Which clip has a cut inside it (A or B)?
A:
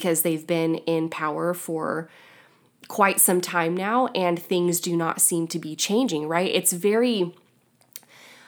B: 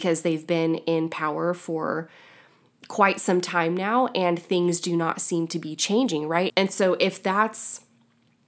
B